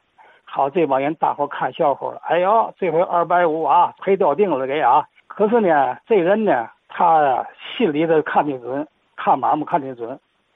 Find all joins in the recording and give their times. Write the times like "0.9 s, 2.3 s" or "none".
5.2 s, 6.8 s